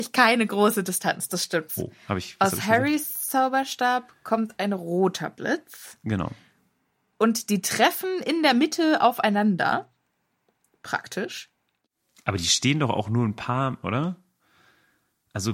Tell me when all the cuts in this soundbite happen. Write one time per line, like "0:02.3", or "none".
0:01.7
0:13.8